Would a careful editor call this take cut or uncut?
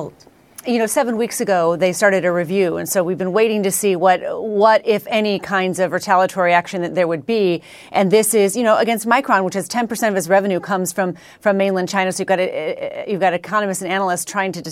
uncut